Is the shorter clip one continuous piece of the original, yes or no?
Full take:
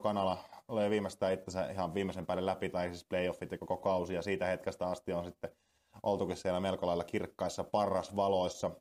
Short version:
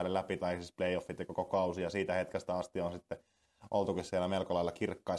yes